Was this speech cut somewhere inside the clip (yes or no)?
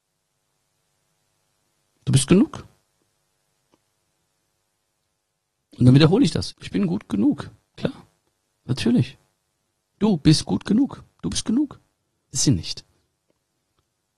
yes